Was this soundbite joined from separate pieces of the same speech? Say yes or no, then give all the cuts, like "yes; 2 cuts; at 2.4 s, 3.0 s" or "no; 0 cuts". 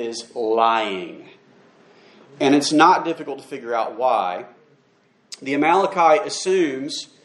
no; 0 cuts